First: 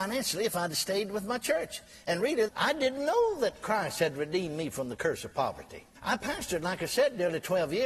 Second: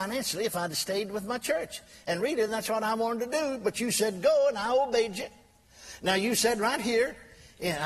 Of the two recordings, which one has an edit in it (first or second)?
first